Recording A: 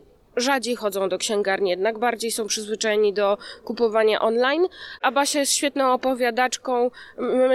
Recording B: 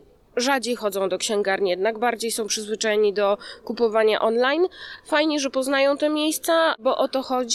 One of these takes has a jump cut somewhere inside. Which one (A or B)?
A